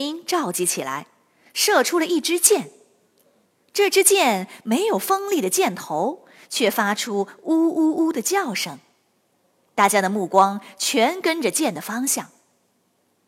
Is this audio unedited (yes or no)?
yes